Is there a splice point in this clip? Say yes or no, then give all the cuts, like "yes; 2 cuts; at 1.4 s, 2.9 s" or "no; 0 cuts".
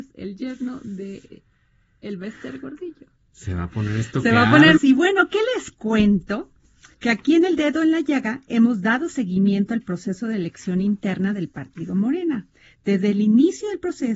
yes; 2 cuts; at 4.8 s, 6.9 s